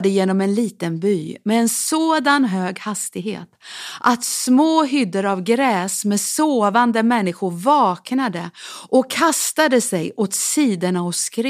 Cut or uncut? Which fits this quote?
uncut